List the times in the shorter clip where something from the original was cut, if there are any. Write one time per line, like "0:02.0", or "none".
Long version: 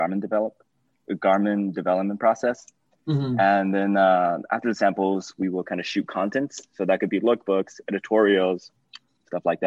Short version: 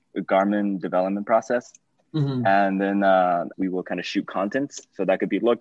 0:03.5